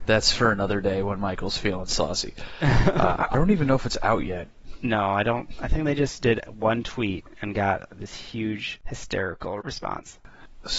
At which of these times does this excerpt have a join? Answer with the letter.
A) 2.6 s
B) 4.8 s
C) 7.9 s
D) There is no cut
D